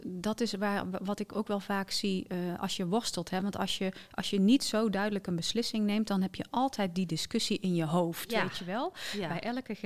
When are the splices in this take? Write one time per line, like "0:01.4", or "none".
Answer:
none